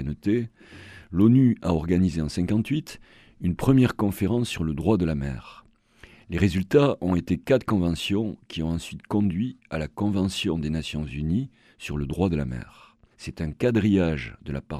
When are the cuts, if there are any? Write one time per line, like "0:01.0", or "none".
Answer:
0:13.1